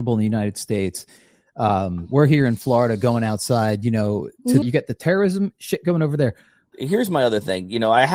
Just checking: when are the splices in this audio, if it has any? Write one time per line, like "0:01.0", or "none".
0:04.6
0:06.7